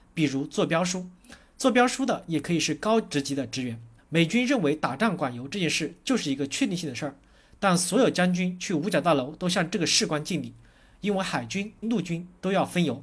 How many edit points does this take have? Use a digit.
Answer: 2